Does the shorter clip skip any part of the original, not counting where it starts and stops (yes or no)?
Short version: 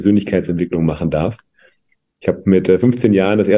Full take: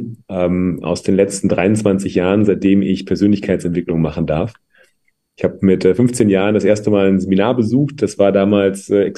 no